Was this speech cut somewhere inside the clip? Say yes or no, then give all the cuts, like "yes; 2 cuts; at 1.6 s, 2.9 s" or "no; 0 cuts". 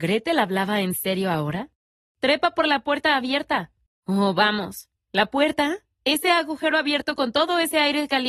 yes; 1 cut; at 3.9 s